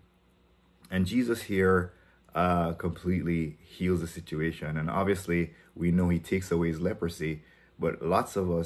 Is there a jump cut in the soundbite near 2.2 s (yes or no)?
no